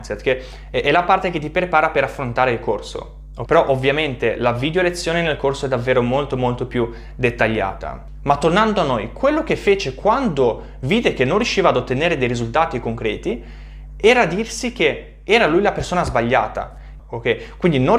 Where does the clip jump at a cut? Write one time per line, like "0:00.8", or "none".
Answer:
0:03.5
0:17.0